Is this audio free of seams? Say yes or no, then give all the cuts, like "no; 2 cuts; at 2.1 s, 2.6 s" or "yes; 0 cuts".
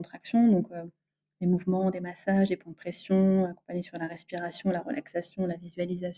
yes; 0 cuts